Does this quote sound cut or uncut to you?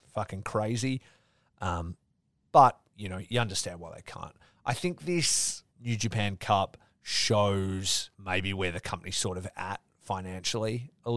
cut